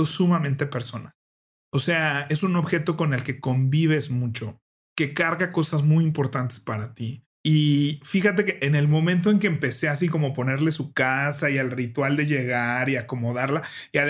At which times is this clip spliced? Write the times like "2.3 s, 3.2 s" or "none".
none